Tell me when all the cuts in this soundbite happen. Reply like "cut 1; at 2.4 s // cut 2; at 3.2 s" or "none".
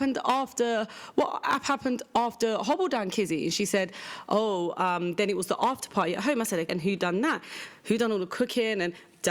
cut 1; at 6.7 s